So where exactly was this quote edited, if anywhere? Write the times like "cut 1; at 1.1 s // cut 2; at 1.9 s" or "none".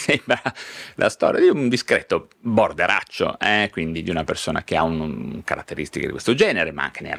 none